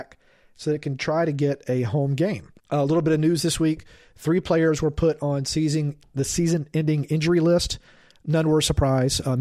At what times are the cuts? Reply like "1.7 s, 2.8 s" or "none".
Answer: 2.6 s